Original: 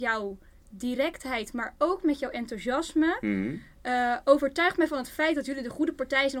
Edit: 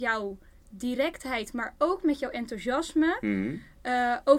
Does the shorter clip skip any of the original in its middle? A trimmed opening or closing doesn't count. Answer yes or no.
no